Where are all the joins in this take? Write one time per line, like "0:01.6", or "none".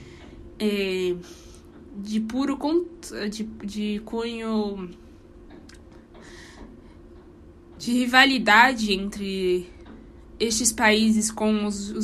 none